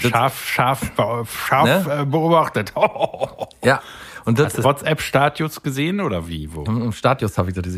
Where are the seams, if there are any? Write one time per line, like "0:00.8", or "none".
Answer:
0:04.6
0:06.7